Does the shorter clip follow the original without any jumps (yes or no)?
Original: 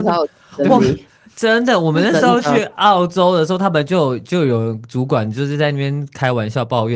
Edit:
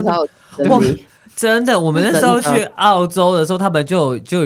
yes